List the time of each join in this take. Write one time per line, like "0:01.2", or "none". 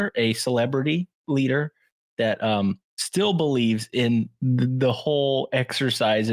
0:02.9